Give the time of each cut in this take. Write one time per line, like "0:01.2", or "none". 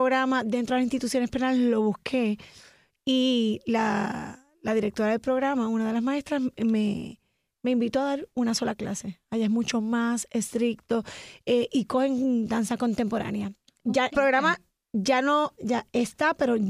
0:14.1
0:15.6